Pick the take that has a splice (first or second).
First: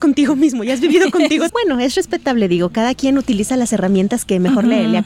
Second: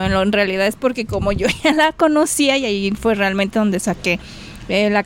first